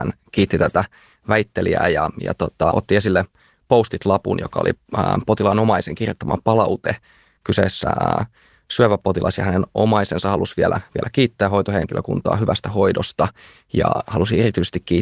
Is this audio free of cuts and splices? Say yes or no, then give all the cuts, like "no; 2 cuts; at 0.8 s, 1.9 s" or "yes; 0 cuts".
no; 1 cut; at 2.7 s